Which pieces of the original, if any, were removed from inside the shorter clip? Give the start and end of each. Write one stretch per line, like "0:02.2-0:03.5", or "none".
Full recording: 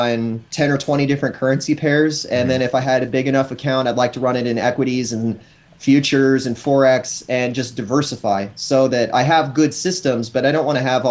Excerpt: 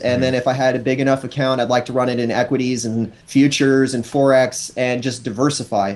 0:05.5-0:05.7